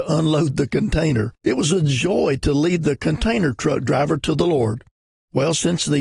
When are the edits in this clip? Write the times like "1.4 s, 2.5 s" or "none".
1.4 s